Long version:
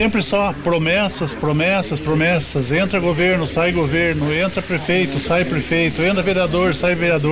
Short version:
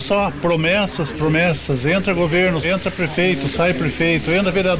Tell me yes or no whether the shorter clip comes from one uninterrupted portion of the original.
no